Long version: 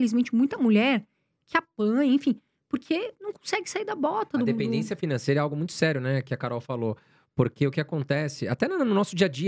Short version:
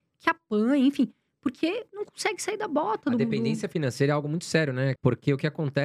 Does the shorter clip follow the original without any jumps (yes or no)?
no